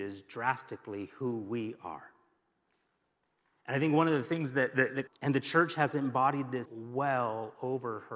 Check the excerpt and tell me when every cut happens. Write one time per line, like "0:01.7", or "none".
0:05.1
0:06.6